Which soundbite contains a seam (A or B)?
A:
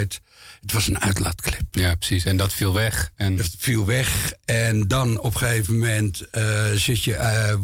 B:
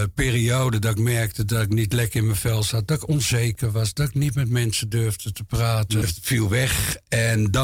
B